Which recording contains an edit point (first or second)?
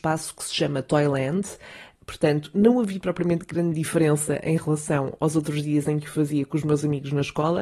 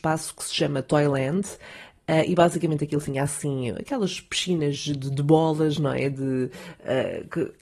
first